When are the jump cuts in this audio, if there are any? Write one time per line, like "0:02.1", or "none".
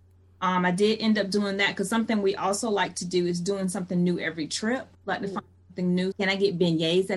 0:04.9
0:06.1